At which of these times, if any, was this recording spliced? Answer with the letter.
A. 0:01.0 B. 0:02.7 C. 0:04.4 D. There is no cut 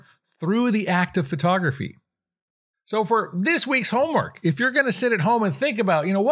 B